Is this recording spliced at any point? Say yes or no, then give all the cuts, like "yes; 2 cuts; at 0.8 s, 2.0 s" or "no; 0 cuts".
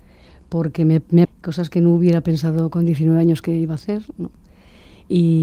yes; 1 cut; at 1.2 s